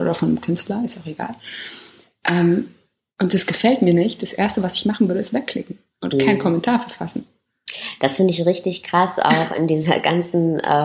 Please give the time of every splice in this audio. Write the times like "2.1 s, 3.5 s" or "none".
none

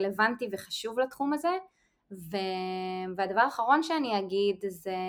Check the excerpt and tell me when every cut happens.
none

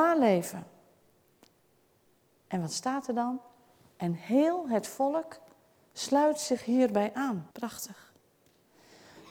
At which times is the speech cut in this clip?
7.5 s

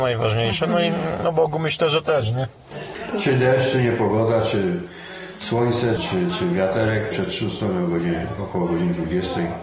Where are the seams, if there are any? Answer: 6.0 s, 7.1 s

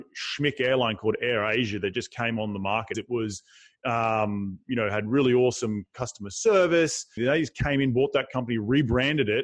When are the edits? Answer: 2.9 s, 7.2 s

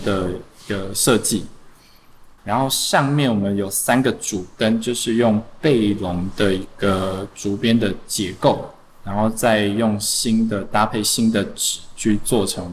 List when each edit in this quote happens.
2.4 s

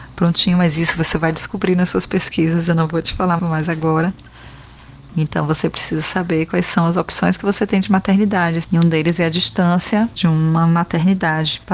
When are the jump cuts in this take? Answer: 3.4 s, 8.6 s

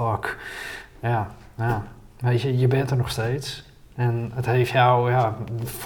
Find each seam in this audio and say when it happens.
none

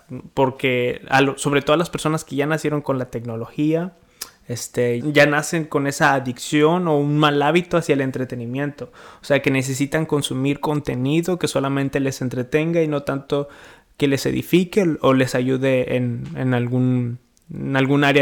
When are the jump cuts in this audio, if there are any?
5.0 s

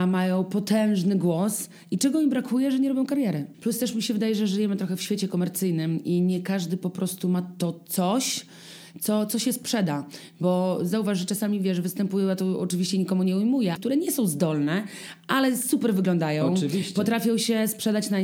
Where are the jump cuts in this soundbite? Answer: 3.5 s, 13.7 s

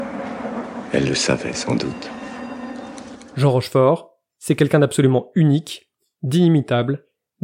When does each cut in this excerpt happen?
none

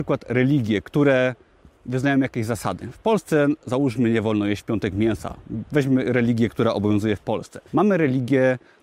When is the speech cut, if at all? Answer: 7.7 s

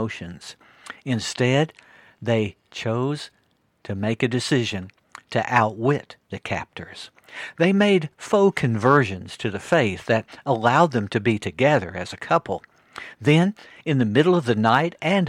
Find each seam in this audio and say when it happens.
none

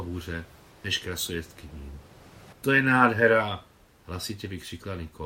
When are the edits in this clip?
2.5 s

